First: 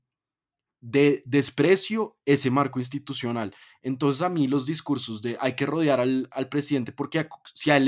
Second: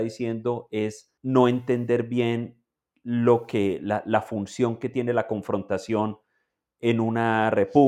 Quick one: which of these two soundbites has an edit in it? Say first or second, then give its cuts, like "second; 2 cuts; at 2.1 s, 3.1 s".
second; 1 cut; at 1.2 s